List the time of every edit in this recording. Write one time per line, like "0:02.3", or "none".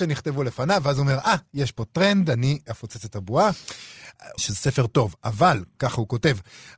0:02.7
0:04.4

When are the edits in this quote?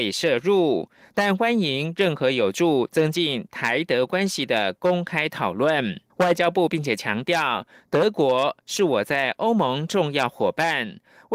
0:06.1

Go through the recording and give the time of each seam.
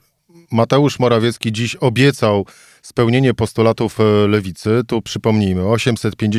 none

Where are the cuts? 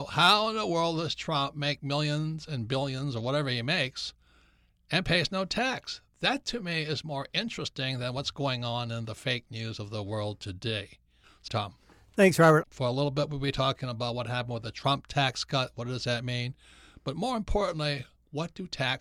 0:11.5
0:12.6

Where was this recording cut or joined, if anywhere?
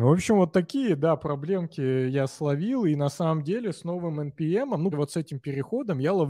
0:04.9

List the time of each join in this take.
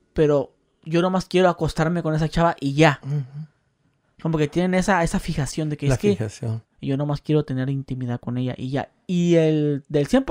0:04.0
0:06.6

